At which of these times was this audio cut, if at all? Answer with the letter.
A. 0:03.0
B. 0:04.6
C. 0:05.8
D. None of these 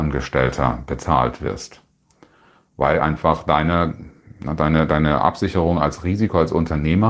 D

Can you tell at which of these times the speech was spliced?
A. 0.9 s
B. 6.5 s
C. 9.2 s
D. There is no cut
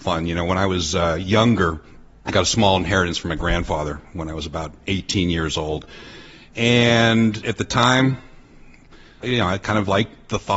C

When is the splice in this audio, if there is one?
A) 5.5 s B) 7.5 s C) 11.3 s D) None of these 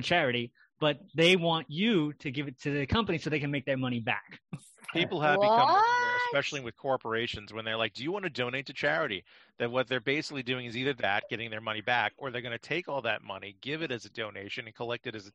D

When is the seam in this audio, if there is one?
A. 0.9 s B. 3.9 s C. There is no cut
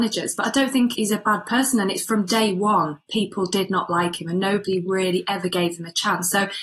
A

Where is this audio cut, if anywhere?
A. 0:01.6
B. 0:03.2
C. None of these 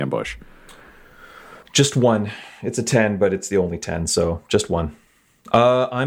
A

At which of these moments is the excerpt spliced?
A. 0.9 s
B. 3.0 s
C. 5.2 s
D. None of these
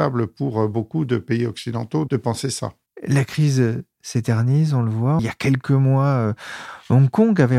C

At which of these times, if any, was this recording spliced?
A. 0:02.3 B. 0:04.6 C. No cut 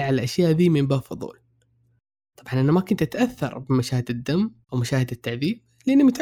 B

